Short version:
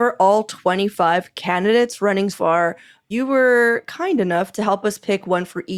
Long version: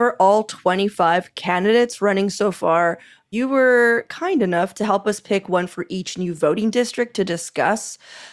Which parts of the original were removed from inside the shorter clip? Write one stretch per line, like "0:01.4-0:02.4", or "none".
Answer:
0:02.3-0:02.5